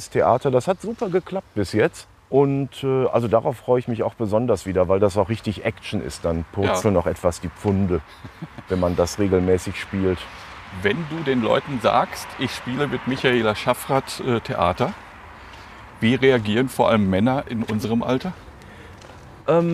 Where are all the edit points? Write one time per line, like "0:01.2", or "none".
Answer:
none